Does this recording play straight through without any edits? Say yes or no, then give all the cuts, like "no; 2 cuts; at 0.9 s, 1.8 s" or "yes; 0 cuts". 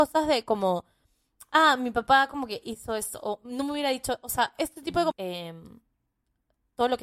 no; 1 cut; at 5.1 s